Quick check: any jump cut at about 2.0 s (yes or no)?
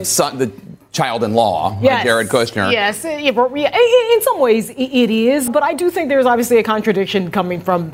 no